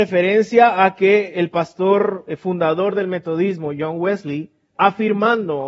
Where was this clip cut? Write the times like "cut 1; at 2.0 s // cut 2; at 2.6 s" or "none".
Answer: cut 1; at 4.7 s

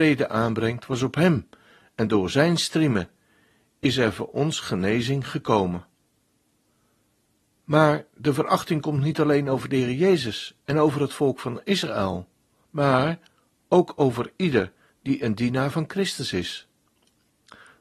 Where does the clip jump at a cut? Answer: cut 1; at 12.6 s

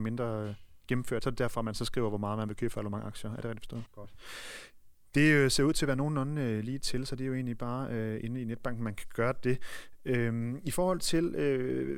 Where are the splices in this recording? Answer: cut 1; at 3.8 s

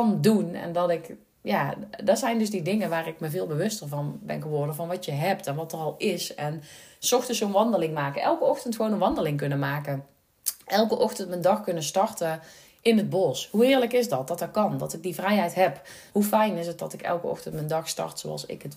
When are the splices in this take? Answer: cut 1; at 16.1 s

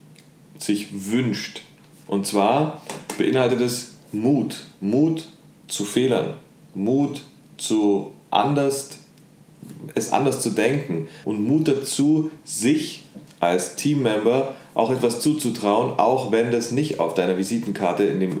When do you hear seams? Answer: cut 1; at 11.2 s

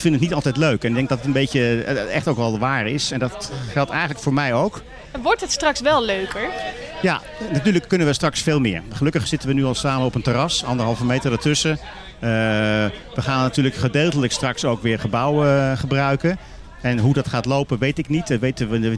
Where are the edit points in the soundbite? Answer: none

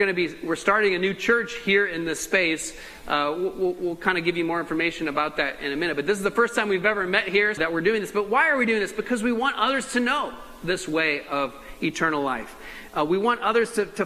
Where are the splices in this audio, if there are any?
cut 1; at 7.6 s

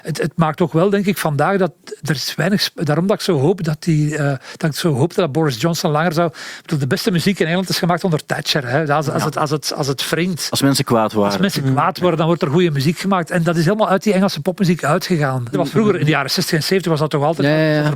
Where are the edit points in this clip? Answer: cut 1; at 15.5 s

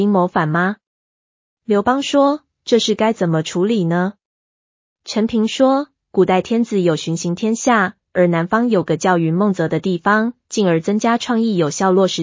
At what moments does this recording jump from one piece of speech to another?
cut 1; at 8.1 s // cut 2; at 10.4 s

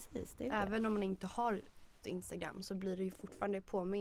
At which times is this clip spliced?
cut 1; at 2.0 s

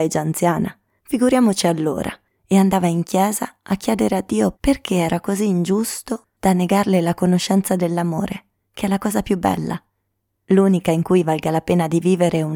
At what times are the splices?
cut 1; at 4.5 s

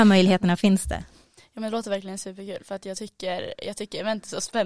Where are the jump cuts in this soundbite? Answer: none

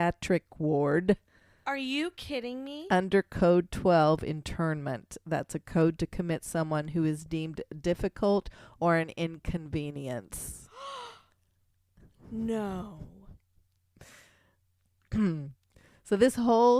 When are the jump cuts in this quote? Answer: none

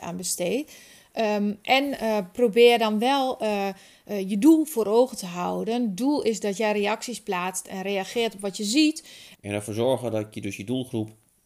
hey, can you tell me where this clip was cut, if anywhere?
cut 1; at 9.3 s

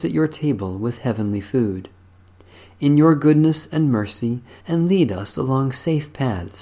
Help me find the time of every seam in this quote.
cut 1; at 4.6 s

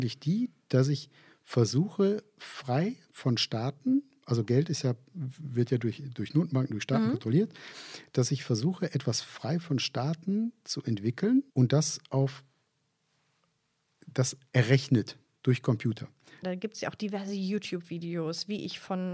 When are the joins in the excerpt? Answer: cut 1; at 11.5 s // cut 2; at 16.4 s

